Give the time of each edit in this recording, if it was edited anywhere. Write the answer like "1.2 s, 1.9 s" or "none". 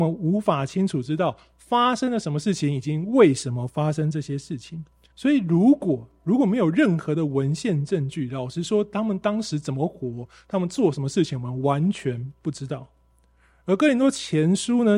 5.1 s